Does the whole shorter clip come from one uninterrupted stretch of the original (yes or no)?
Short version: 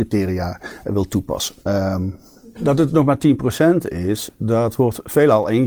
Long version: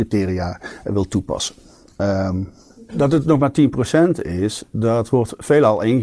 no